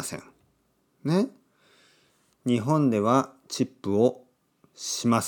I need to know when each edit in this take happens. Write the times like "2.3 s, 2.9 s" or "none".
2.3 s